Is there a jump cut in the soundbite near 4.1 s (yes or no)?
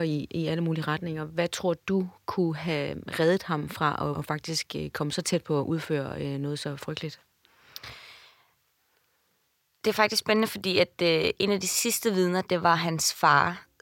yes